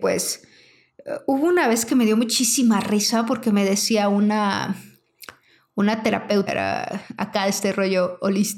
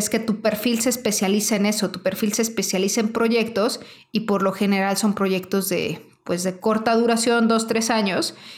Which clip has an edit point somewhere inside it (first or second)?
first